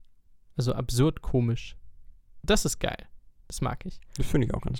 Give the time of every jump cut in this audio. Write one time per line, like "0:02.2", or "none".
0:02.4